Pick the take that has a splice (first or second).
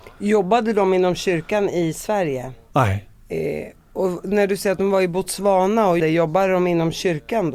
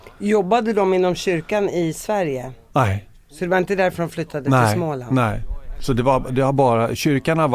first